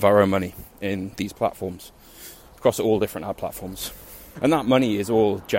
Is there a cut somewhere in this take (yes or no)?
yes